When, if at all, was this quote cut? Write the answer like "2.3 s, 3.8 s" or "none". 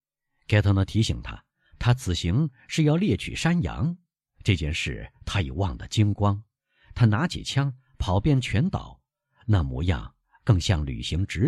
none